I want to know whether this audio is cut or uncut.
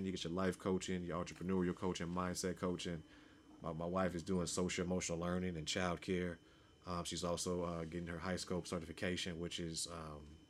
uncut